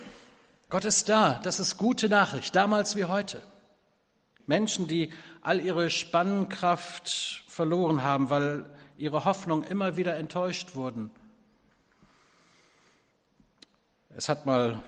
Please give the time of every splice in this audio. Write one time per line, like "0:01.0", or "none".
0:04.4